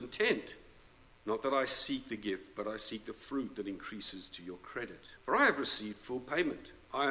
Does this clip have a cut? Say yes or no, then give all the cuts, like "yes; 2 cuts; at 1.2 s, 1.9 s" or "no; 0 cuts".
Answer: yes; 2 cuts; at 1.1 s, 5.2 s